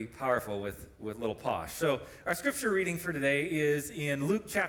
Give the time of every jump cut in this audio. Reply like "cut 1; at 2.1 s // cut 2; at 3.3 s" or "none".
none